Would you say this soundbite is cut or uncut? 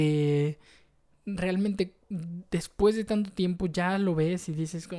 cut